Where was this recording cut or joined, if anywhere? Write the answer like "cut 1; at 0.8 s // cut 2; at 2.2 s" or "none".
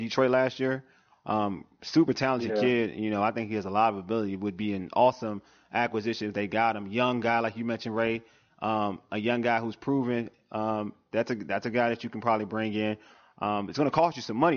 none